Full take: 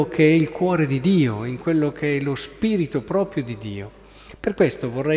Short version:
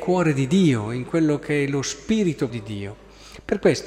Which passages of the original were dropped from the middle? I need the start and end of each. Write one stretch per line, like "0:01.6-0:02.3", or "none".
0:03.0-0:03.5